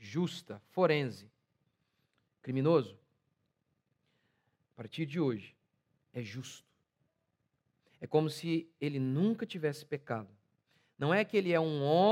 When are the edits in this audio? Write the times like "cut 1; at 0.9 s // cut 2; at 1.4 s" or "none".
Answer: cut 1; at 4.6 s